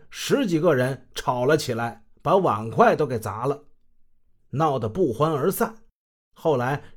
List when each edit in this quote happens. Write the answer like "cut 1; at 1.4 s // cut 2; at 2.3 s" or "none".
cut 1; at 2.1 s